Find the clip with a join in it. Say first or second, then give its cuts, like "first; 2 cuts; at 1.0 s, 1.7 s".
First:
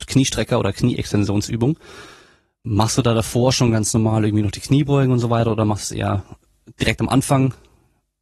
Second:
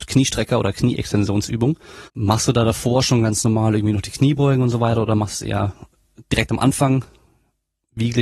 second; 1 cut; at 2.1 s